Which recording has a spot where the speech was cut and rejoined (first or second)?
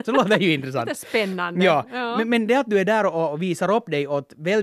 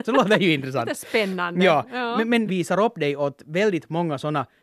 second